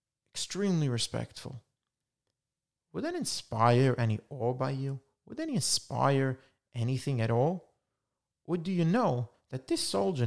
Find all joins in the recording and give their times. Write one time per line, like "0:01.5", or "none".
none

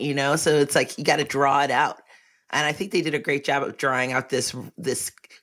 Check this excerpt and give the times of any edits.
none

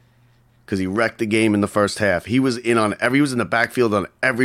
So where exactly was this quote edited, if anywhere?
none

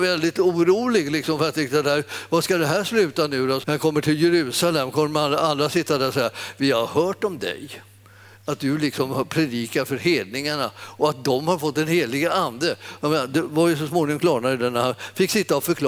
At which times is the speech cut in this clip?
0:03.6
0:13.0

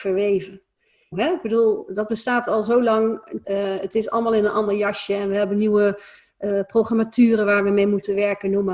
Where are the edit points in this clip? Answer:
0:01.1
0:03.4

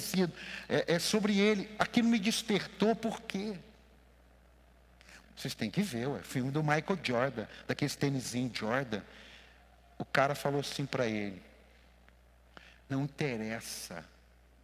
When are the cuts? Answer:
0:05.2

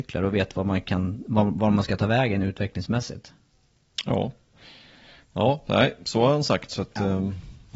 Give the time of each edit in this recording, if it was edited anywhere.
none

